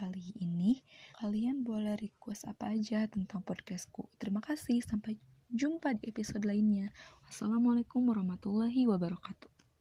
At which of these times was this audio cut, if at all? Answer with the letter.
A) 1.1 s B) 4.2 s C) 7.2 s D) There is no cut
A